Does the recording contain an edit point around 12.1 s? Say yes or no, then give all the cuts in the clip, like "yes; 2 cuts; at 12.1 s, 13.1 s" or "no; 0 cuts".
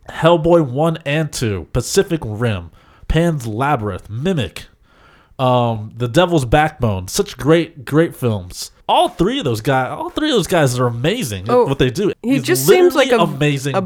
yes; 2 cuts; at 8.8 s, 12.1 s